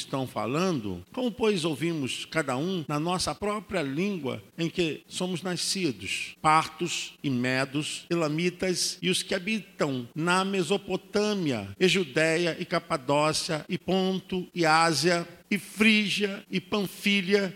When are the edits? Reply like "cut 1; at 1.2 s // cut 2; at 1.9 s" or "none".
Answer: none